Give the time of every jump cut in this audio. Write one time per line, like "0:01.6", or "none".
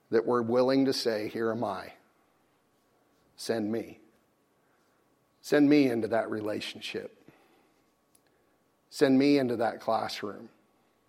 none

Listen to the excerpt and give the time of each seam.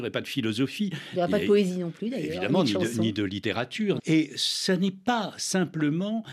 0:04.0

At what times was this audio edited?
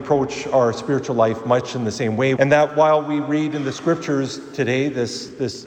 0:02.4

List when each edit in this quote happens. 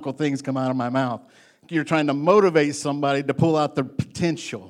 none

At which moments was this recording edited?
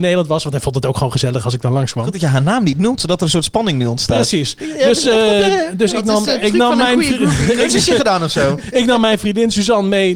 none

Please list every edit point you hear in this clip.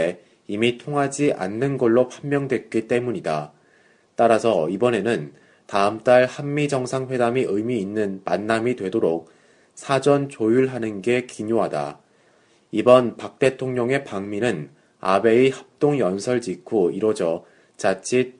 none

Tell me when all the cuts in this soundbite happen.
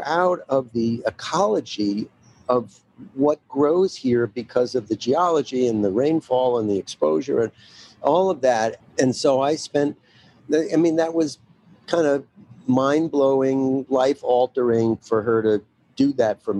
0:08.8

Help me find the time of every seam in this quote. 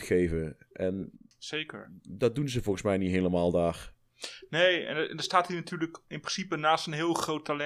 0:02.0

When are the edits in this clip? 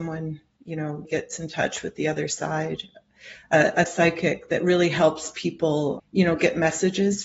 0:01.0
0:06.0

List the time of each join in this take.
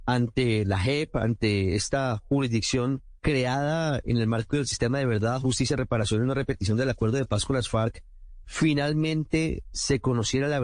0:03.2

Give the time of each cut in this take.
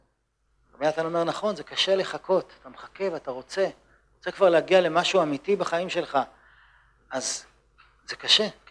none

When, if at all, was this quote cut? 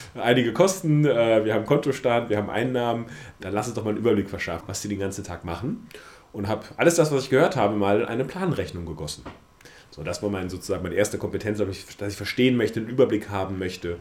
0:04.6

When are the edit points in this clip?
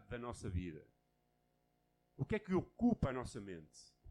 none

